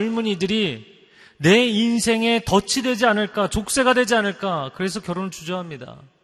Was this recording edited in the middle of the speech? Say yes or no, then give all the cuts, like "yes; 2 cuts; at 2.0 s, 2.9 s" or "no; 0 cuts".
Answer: no; 0 cuts